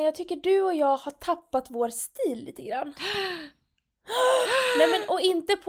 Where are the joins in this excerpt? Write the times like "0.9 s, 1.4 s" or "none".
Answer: none